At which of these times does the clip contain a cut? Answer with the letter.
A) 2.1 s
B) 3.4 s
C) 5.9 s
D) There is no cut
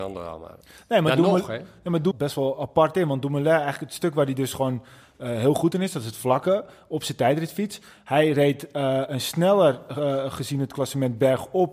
A